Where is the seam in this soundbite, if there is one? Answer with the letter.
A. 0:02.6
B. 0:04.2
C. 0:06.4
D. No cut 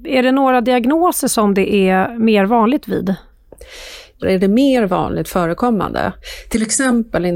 B